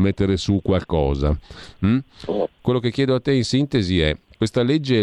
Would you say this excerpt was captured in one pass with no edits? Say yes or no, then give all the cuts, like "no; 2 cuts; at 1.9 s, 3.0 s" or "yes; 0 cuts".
no; 1 cut; at 2.6 s